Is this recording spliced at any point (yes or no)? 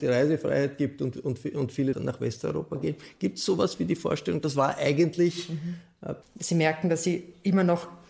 yes